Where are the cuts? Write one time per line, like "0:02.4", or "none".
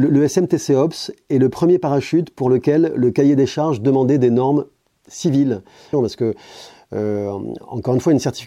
0:05.9